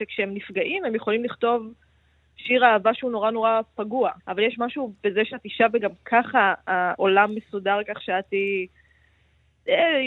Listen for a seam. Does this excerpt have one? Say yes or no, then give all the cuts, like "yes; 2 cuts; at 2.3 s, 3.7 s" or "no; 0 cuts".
yes; 1 cut; at 4.2 s